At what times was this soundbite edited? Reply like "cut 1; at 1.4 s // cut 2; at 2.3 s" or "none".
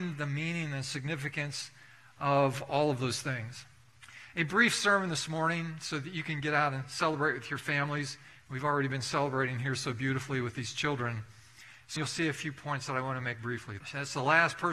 cut 1; at 12.0 s // cut 2; at 13.8 s